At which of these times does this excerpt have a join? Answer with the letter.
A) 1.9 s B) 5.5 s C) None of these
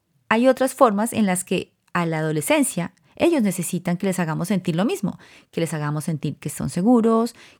C